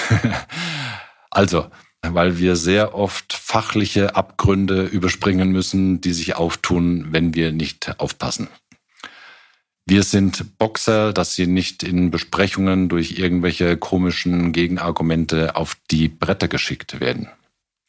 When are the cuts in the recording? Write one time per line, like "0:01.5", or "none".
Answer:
0:02.0
0:11.1